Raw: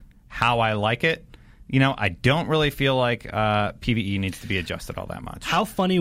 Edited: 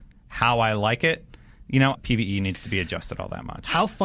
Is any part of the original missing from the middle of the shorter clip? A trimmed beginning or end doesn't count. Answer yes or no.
yes